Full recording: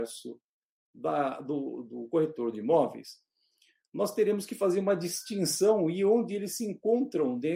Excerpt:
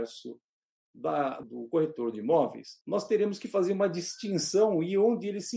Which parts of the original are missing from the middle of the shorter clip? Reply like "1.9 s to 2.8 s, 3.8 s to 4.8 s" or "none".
1.4 s to 1.8 s, 3.2 s to 3.9 s